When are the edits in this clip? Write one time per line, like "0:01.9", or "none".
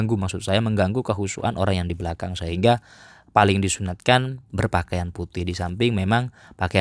none

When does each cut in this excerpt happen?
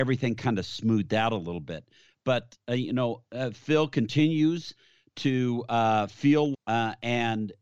0:06.5

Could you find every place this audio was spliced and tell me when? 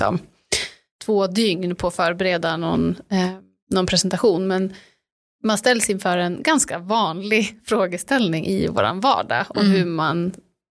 none

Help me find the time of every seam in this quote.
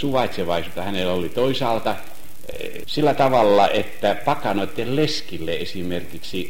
0:02.8

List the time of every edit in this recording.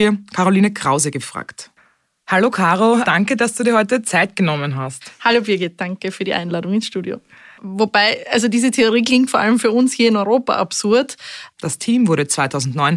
0:07.6
0:11.5

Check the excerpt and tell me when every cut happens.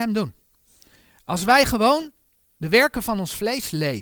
none

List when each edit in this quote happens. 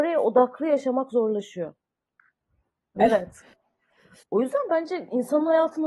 0:03.0
0:04.2

